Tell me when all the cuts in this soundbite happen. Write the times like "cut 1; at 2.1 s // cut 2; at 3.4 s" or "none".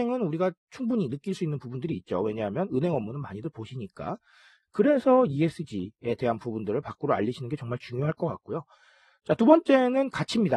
cut 1; at 4.6 s